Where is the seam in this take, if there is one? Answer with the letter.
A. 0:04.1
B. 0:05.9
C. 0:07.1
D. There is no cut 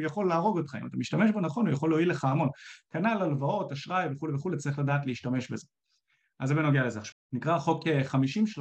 C